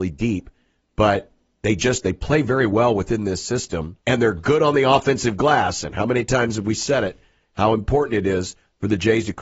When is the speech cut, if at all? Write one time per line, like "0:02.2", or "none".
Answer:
0:04.0